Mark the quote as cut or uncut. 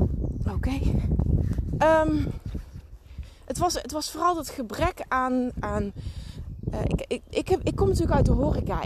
cut